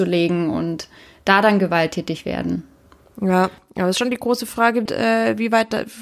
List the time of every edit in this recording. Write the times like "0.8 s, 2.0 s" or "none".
3.0 s, 4.9 s